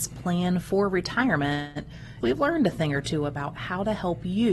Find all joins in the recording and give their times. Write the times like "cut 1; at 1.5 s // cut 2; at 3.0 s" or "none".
cut 1; at 2.2 s